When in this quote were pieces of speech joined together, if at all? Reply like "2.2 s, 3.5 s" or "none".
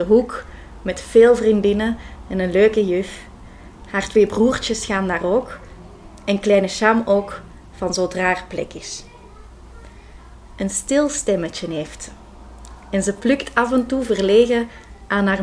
none